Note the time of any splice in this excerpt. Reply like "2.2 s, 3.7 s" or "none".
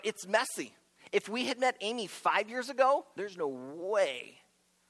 3.2 s